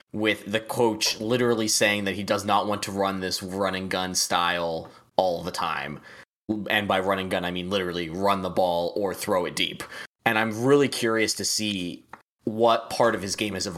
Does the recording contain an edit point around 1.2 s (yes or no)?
no